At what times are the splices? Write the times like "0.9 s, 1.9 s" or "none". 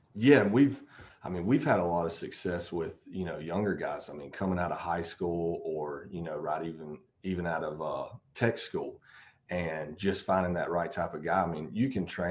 none